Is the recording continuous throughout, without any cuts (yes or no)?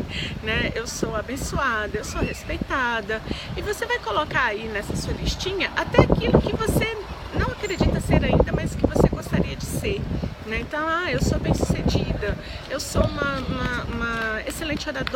yes